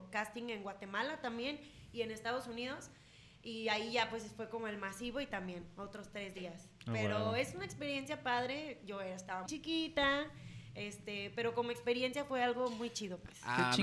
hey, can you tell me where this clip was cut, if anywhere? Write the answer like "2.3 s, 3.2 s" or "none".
9.5 s